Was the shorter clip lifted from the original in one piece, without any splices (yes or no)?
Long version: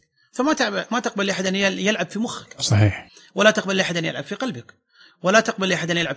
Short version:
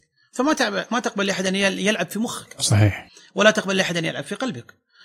yes